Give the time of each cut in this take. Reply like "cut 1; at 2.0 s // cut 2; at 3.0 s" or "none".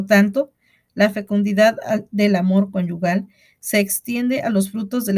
none